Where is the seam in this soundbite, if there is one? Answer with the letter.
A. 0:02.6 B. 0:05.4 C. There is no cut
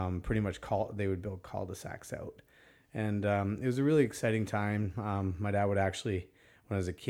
C